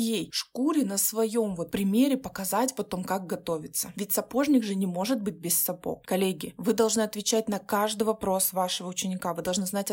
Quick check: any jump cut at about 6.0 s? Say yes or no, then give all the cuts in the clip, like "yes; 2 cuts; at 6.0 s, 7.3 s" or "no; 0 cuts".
yes; 1 cut; at 6.0 s